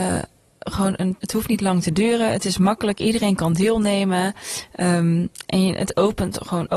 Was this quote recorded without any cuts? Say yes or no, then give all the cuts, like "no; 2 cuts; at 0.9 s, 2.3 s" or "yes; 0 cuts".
no; 1 cut; at 1.2 s